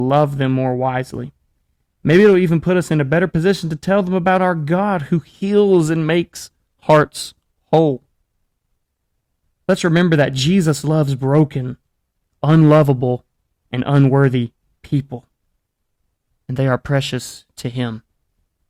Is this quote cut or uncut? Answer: uncut